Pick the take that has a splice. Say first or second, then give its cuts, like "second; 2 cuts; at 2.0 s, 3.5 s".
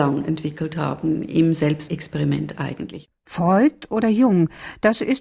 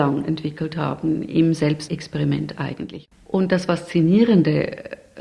second; 1 cut; at 3.1 s